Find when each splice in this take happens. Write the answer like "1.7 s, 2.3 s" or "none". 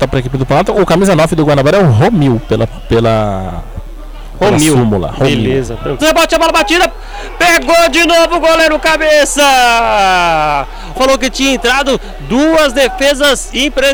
6.0 s, 10.9 s